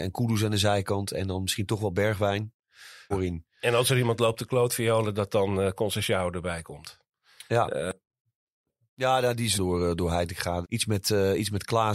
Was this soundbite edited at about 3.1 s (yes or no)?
yes